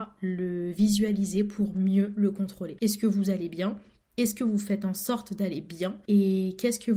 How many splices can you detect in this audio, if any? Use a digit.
1